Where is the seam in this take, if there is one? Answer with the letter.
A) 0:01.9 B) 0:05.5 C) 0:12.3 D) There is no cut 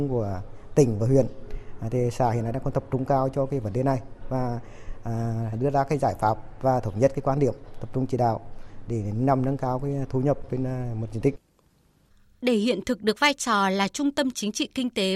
B